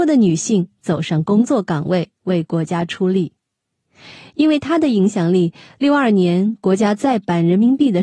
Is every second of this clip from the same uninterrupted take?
yes; 0 cuts

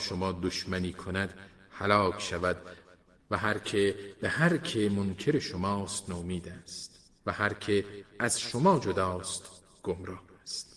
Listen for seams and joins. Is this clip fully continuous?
no; 1 cut; at 7.2 s

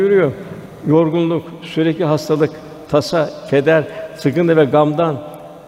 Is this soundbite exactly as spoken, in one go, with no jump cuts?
yes; 0 cuts

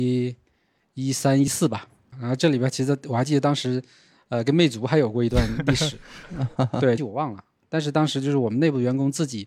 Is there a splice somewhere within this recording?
yes; 2 cuts; at 2.1 s, 7.0 s

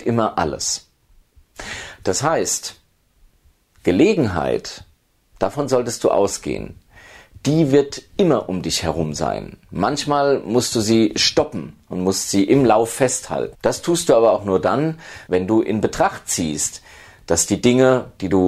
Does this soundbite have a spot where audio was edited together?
yes; 2 cuts; at 13.5 s, 15.3 s

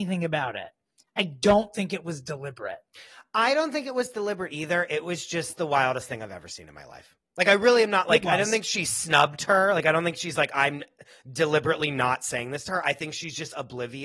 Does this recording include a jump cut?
no; 0 cuts

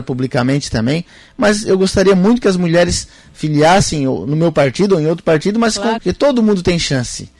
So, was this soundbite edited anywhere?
yes; 1 cut; at 6.0 s

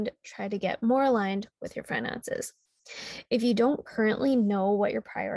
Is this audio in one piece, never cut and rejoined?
yes; 0 cuts

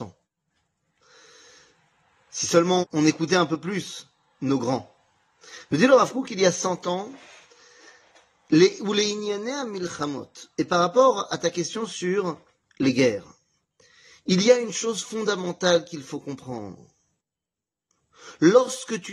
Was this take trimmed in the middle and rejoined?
yes; 1 cut; at 2.8 s

